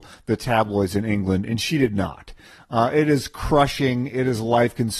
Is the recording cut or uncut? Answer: uncut